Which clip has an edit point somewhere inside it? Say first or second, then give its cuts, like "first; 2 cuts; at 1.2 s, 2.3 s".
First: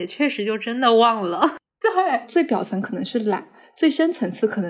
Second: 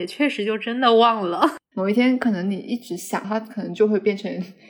second; 2 cuts; at 1.7 s, 3.2 s